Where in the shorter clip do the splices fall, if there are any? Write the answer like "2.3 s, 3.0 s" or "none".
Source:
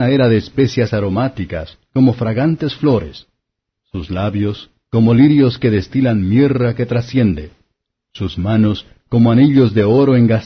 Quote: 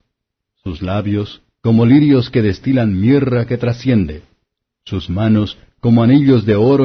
none